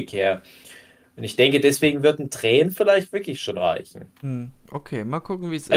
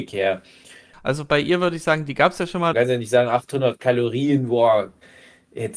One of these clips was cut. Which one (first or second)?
second